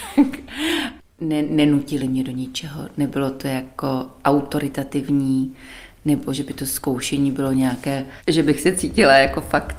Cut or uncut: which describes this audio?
uncut